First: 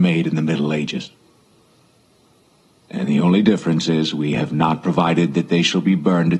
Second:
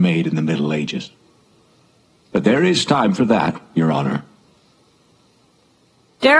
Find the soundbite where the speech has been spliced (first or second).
second